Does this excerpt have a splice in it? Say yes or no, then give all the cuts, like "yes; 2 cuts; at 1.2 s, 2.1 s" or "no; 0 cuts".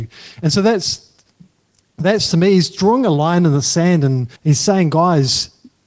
yes; 1 cut; at 4.4 s